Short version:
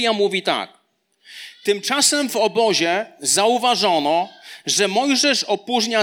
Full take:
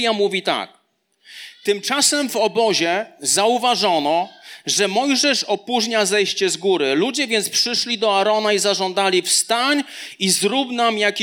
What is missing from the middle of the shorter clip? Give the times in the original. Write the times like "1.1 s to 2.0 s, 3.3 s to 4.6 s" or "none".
none

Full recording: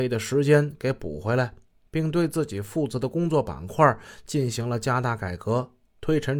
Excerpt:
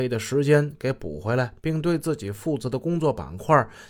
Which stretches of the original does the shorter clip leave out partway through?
1.6 s to 1.9 s

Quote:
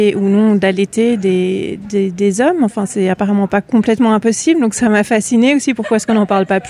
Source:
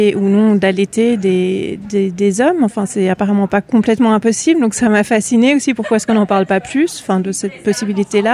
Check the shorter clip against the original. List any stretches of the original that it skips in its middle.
none

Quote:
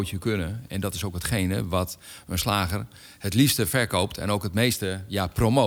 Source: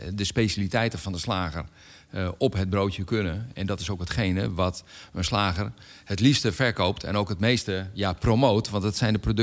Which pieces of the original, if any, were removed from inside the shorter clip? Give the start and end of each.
none

